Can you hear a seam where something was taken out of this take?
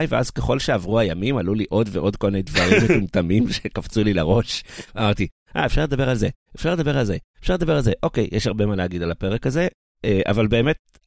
no; 0 cuts

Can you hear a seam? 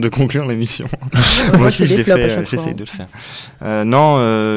yes; 1 cut; at 1.1 s

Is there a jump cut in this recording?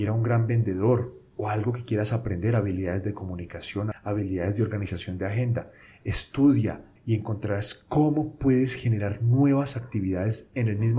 yes; 2 cuts; at 3.9 s, 7.0 s

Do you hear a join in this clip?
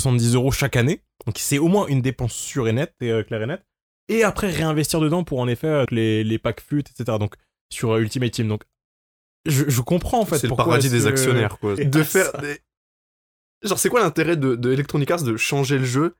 yes; 2 cuts; at 5.9 s, 11.8 s

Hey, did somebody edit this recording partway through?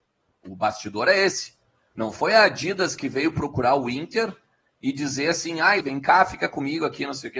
yes; 1 cut; at 5.8 s

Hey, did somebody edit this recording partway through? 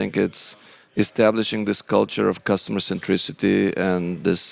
no; 0 cuts

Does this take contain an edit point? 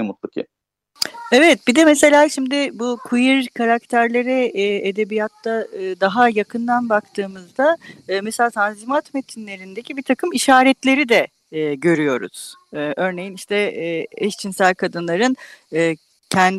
no; 0 cuts

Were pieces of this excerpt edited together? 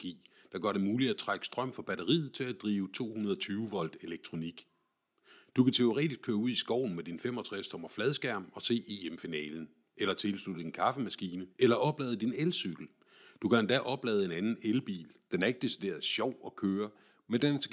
yes; 2 cuts; at 11.5 s, 15.3 s

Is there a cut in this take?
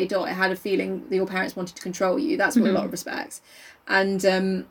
yes; 1 cut; at 2.6 s

